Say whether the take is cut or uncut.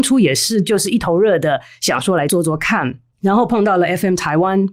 uncut